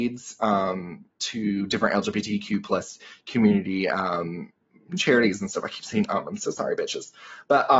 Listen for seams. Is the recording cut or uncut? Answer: cut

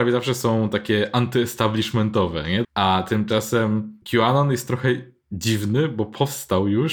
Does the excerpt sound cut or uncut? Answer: cut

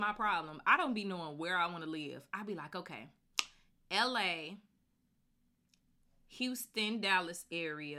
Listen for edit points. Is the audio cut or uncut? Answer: uncut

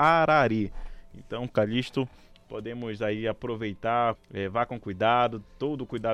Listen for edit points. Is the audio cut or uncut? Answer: cut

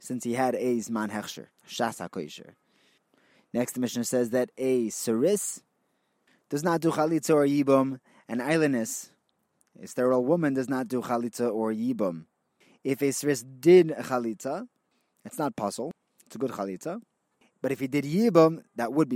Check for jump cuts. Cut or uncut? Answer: uncut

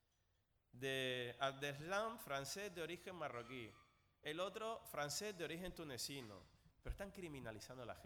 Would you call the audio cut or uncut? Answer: cut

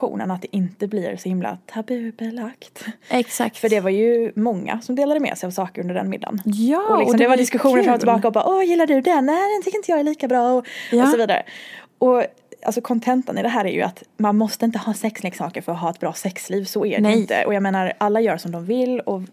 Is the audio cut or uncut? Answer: uncut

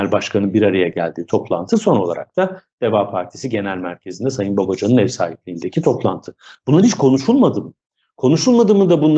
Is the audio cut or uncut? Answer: uncut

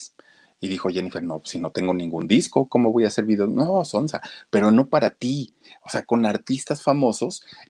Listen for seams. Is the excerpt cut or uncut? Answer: uncut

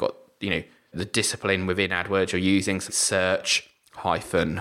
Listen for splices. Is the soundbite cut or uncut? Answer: cut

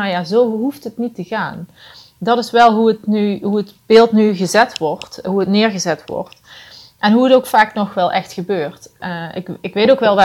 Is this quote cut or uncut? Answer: uncut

